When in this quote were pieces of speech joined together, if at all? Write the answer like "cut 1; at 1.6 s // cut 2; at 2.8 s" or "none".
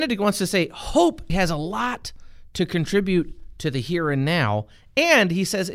cut 1; at 1.3 s